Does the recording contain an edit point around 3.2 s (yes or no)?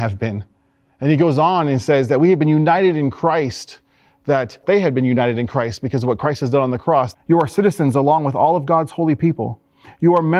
no